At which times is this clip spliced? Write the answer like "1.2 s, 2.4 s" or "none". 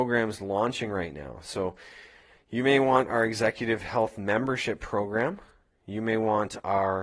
none